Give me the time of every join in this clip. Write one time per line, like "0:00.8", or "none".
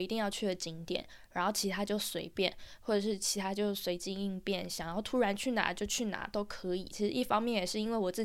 0:06.9